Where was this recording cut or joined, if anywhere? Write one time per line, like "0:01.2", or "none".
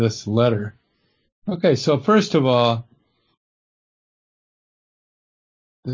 none